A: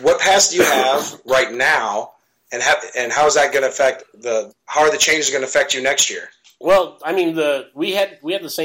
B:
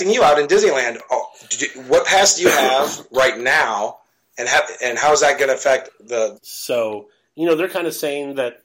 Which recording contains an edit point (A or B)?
B